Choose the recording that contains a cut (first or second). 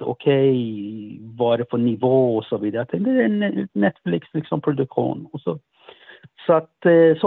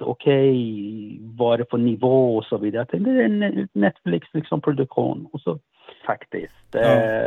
second